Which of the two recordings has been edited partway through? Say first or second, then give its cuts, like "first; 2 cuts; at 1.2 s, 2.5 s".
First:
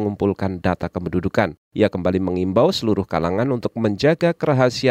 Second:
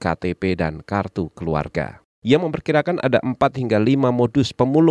second; 1 cut; at 2.1 s